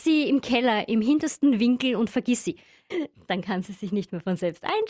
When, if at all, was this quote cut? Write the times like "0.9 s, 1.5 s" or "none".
2.9 s